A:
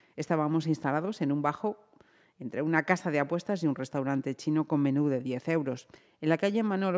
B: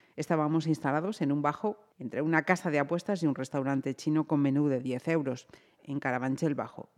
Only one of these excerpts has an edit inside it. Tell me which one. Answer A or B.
B